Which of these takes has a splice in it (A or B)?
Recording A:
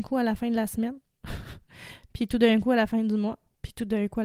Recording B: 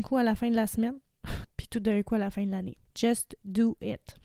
B